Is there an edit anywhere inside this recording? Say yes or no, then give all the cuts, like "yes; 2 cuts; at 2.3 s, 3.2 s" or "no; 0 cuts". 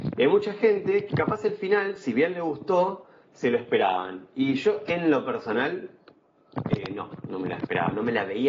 no; 0 cuts